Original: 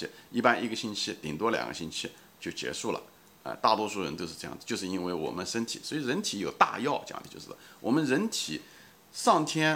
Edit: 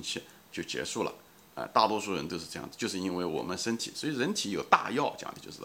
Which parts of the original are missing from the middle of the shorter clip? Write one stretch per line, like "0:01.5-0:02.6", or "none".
none